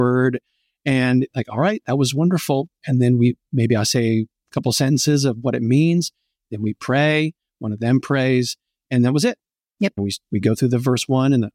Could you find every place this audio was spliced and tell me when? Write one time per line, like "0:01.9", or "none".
0:10.0